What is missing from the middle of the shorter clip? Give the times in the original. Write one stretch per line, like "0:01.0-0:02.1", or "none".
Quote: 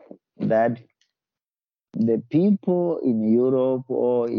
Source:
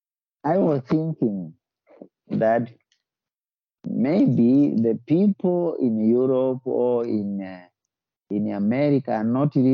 0:03.9-0:04.7